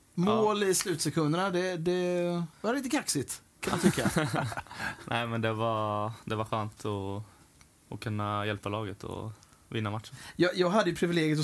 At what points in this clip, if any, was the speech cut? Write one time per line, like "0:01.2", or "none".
0:02.5

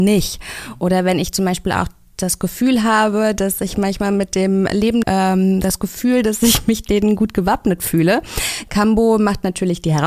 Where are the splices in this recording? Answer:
0:05.0

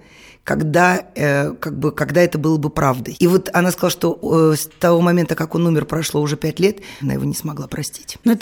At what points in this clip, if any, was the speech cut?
0:07.0

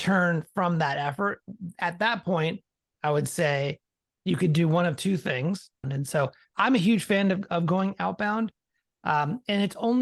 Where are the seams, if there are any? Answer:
0:05.8

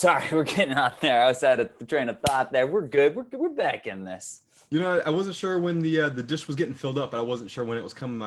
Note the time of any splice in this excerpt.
none

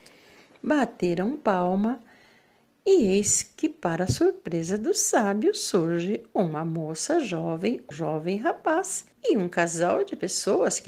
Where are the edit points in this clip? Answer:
0:07.9
0:09.1

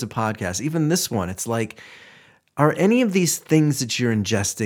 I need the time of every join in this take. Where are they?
none

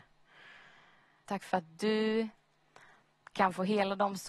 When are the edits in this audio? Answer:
0:01.2

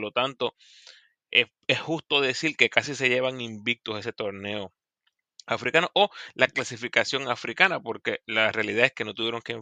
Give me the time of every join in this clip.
0:01.3

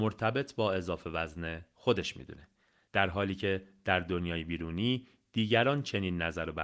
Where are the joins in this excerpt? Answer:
none

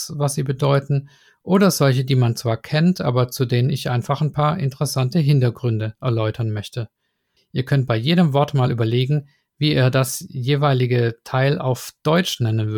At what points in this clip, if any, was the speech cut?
0:07.4

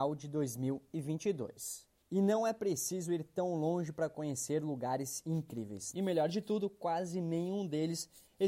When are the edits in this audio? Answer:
0:05.9

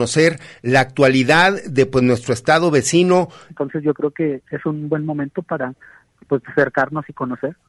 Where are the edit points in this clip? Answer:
0:03.5

